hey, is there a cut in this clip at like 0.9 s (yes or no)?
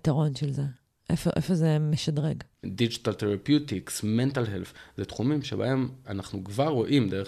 no